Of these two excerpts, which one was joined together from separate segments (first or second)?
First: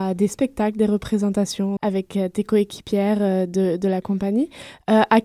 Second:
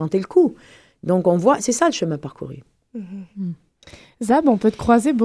first